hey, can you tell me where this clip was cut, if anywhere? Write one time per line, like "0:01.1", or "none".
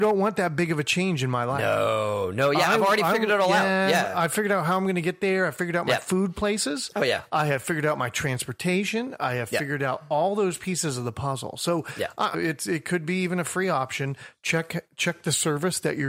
0:12.3